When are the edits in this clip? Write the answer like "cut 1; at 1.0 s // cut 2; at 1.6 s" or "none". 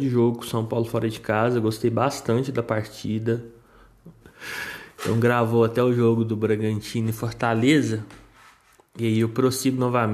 cut 1; at 4.2 s